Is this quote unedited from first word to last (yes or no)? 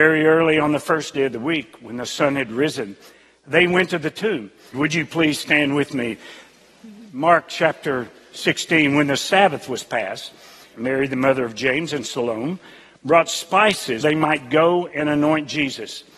no